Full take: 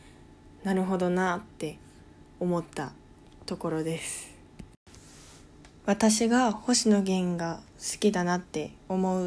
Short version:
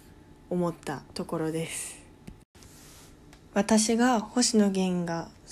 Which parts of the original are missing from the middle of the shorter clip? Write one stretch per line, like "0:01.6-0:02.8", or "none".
0:03.0-0:03.4